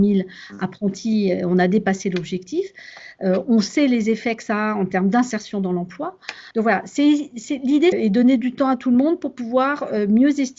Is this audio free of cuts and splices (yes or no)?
no